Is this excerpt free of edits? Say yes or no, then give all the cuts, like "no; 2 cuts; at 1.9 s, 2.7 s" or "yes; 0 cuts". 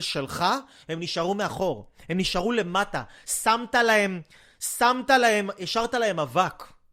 yes; 0 cuts